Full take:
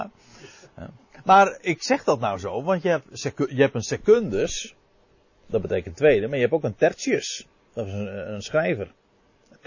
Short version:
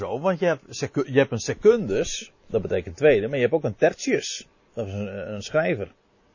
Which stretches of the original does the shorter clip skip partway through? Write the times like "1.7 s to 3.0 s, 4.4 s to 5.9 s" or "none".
4.8 s to 5.4 s

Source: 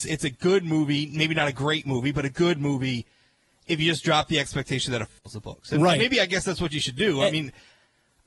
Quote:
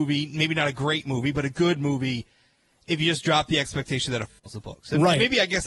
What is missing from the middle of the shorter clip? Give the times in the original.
none

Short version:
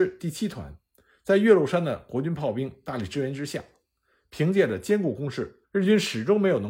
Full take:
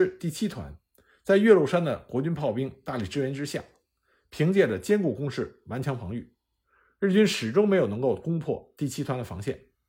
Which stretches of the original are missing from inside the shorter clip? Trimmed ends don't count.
5.6 s to 6.9 s

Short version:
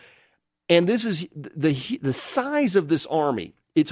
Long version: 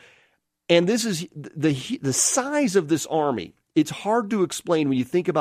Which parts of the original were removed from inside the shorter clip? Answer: none

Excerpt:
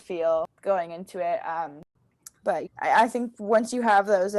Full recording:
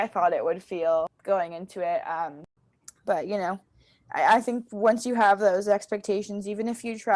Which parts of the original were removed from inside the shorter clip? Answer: 3.3 s to 4.0 s

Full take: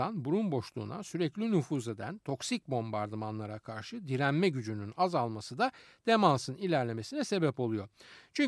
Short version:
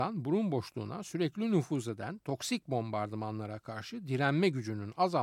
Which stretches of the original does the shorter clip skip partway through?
none

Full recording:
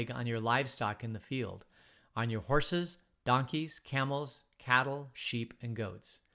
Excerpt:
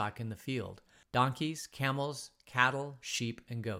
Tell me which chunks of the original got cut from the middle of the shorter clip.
1.9 s to 3.2 s

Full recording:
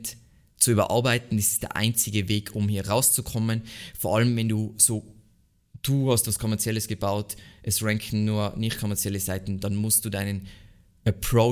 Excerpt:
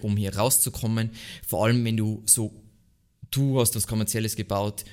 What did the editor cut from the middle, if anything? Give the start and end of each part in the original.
none

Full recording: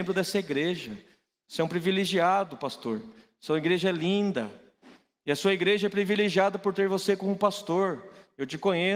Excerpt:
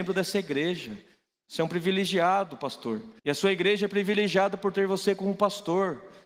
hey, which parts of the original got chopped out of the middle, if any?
3.2 s to 5.2 s

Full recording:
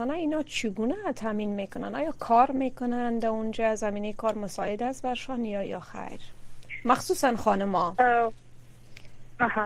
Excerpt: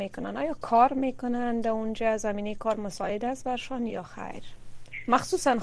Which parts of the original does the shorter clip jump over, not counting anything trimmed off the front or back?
5.5 s to 5.6 s

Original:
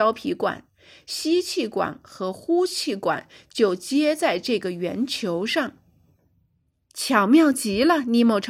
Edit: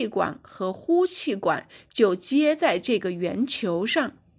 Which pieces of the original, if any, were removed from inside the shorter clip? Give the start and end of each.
none

